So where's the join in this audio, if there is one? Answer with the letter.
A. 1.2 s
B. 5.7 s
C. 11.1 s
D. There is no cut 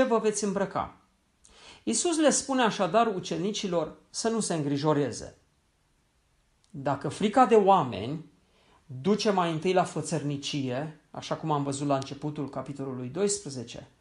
D